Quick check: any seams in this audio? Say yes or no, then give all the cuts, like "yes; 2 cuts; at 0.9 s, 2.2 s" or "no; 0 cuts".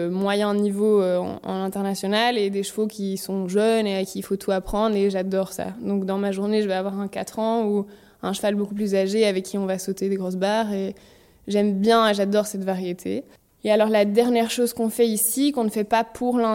no; 0 cuts